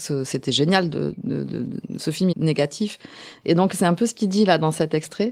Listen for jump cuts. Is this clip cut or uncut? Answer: cut